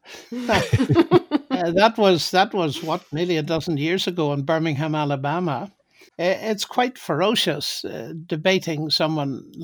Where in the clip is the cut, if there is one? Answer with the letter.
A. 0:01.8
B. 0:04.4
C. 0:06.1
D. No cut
C